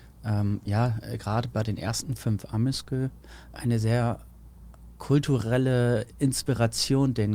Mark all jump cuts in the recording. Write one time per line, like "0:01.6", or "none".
0:03.6